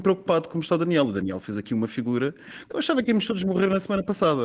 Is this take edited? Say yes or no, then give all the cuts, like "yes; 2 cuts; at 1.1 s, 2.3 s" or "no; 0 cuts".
yes; 1 cut; at 2.7 s